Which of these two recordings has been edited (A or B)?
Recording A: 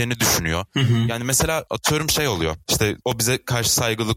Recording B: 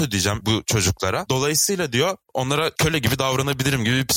A